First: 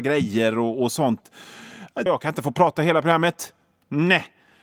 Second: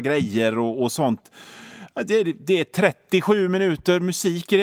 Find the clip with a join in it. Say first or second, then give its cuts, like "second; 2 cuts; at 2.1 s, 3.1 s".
first; 1 cut; at 2.1 s